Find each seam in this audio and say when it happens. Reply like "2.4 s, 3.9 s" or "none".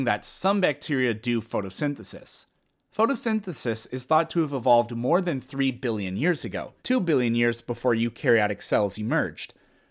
6.8 s